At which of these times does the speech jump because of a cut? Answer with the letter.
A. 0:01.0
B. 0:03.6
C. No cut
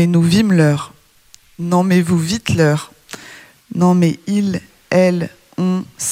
B